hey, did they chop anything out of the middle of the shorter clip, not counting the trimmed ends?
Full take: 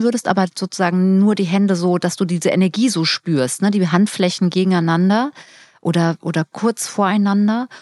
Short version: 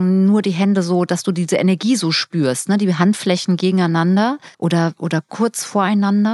yes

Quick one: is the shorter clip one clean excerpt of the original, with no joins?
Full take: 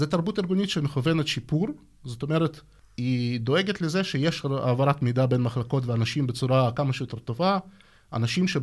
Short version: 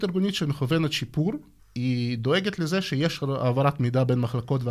no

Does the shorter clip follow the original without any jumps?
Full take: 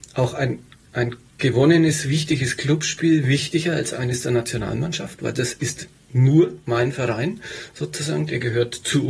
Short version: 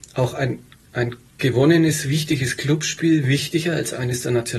yes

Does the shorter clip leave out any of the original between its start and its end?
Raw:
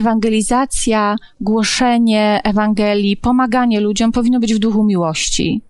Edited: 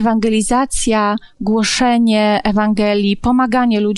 no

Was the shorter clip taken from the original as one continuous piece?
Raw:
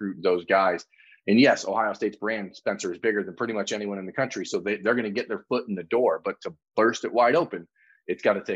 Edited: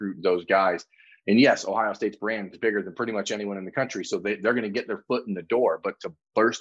no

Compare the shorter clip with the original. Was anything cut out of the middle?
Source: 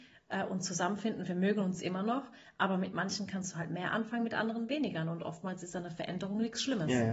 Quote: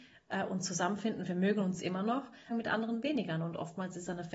yes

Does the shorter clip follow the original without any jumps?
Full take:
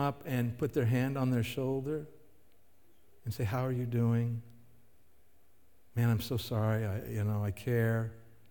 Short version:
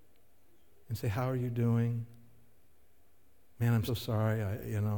no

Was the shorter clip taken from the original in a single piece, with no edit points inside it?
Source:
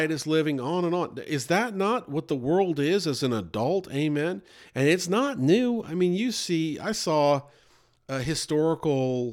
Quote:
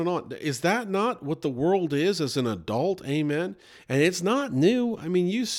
yes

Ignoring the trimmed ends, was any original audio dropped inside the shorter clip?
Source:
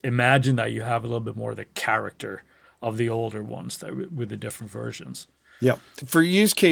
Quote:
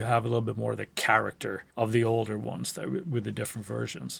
yes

